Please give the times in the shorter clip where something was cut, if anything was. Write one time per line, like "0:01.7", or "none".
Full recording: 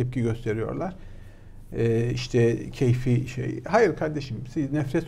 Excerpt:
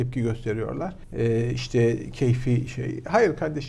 0:01.0

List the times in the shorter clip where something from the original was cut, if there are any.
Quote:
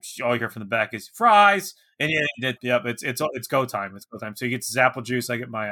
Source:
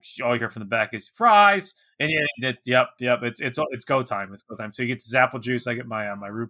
0:02.6

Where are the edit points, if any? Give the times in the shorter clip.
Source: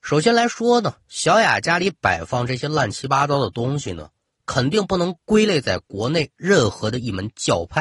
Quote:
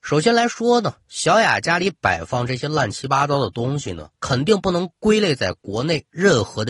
0:04.1

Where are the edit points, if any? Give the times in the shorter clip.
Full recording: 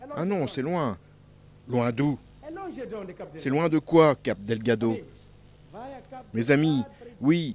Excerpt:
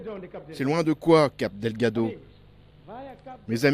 none

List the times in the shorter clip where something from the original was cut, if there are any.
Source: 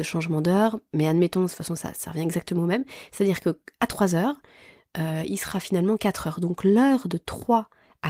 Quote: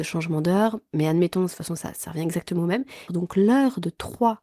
0:03.1

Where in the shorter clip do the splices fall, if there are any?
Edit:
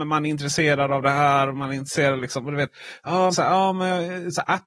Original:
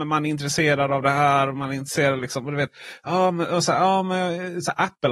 0:03.3

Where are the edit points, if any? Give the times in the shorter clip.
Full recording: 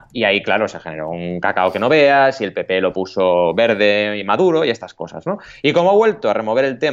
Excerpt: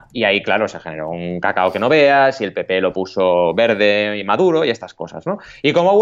none

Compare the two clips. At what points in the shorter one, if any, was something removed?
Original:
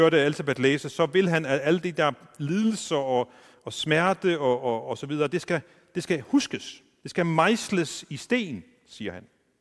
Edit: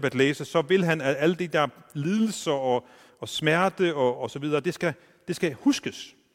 0:04.2

